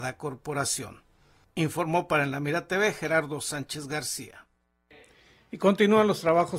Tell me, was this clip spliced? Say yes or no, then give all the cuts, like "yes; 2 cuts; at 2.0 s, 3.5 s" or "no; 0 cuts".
no; 0 cuts